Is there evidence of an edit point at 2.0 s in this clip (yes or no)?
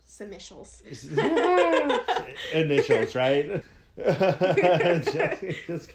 no